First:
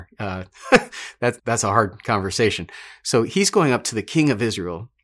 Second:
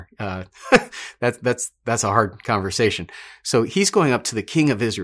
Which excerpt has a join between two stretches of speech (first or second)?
first